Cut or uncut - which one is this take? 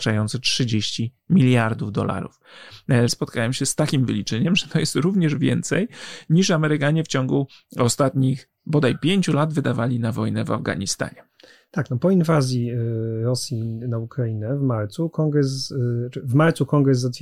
cut